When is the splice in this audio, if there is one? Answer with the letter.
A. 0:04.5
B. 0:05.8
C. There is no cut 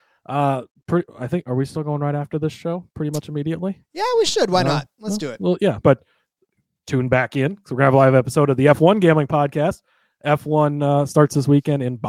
B